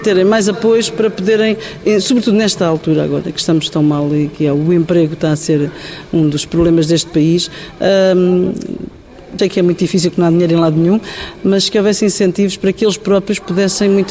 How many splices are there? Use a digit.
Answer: 1